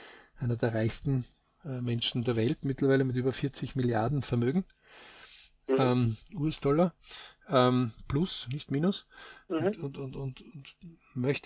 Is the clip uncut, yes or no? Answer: no